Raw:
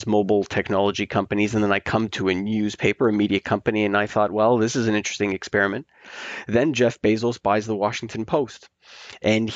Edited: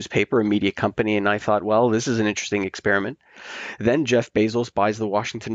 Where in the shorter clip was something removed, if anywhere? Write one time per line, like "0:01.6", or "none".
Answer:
none